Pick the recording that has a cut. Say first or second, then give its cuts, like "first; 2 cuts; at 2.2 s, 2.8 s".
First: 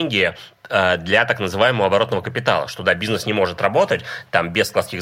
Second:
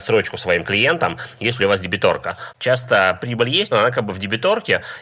second; 2 cuts; at 2.5 s, 3.7 s